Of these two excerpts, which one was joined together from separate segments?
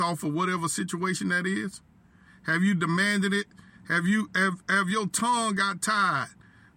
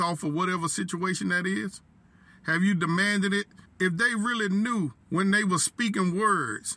second; 2 cuts; at 3.7 s, 5.0 s

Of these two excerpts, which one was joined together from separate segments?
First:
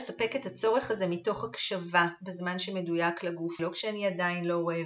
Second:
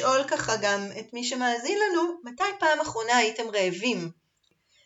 first; 1 cut; at 3.6 s

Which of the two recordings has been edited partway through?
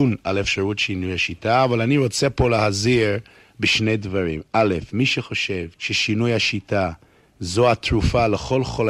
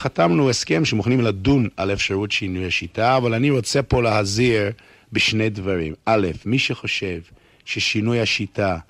first; 1 cut; at 5.7 s

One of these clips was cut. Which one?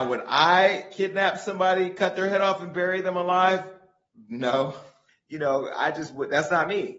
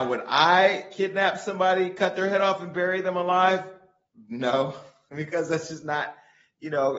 first; 1 cut; at 5.1 s

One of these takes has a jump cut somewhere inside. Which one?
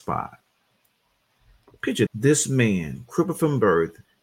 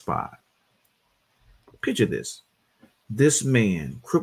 first; 1 cut; at 2.1 s

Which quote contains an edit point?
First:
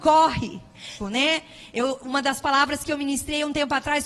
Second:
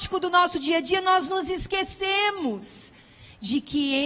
first; 1 cut; at 1.0 s

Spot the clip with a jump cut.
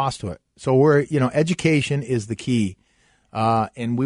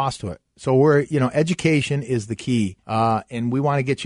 second; 1 cut; at 2.8 s

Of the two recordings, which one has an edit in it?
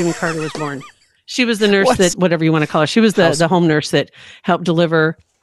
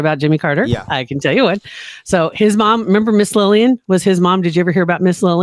first; 1 cut; at 2.1 s

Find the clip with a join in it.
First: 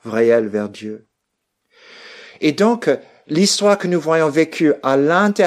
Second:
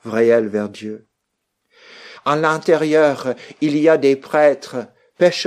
second; 1 cut; at 2.1 s

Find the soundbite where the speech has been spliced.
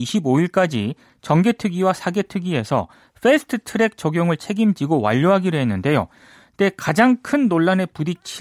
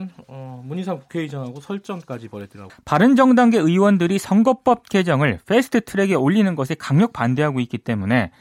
second; 1 cut; at 2.7 s

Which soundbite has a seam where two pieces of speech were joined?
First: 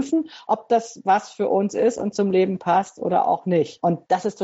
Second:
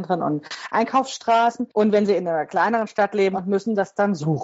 second; 1 cut; at 3.3 s

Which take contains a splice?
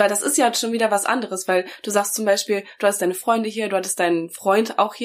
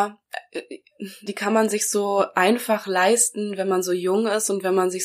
second; 1 cut; at 1.3 s

